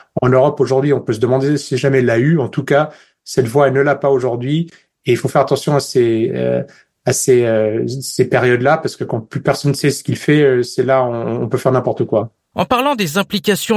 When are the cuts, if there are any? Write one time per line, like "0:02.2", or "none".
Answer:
none